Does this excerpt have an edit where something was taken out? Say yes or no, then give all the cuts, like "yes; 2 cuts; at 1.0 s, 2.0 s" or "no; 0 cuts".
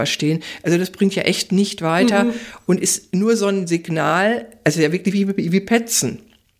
no; 0 cuts